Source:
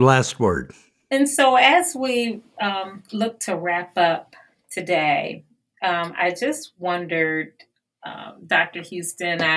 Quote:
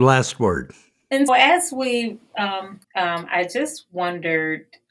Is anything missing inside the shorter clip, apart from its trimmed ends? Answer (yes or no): yes